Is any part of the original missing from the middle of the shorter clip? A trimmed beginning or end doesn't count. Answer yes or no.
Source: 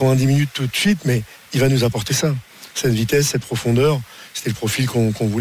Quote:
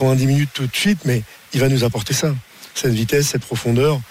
no